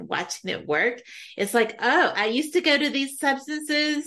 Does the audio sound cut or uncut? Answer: uncut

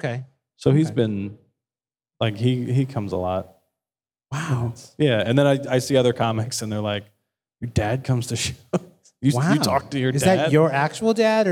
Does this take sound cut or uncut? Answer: uncut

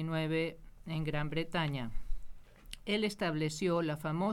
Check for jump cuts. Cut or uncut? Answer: uncut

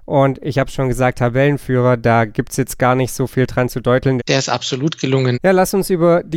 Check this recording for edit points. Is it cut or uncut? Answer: cut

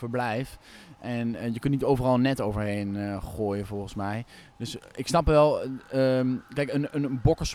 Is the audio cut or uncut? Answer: uncut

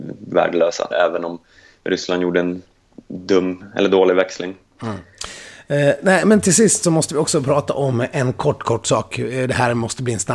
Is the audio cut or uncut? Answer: cut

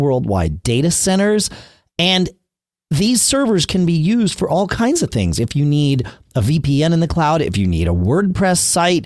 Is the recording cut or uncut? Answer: uncut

